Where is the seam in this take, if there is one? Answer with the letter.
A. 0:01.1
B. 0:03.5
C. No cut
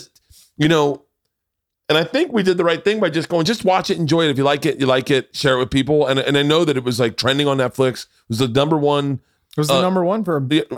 C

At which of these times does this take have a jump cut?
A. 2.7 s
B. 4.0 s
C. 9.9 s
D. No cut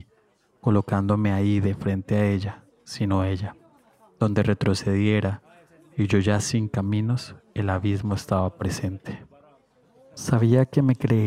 A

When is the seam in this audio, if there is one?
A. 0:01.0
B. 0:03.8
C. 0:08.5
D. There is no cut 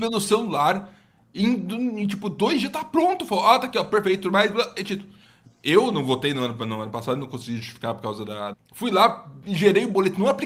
C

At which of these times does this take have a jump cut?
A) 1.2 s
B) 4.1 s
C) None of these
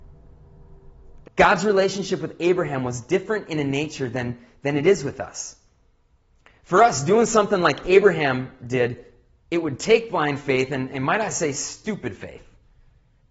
A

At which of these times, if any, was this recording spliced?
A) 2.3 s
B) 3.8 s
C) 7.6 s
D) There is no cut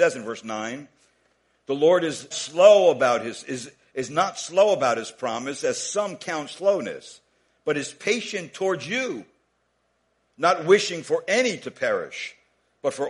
A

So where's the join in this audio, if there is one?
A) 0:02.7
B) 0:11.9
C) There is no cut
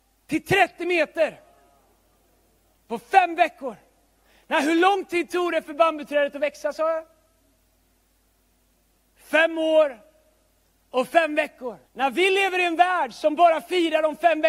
B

